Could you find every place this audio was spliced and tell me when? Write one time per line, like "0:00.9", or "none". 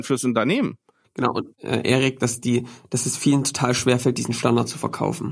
0:01.6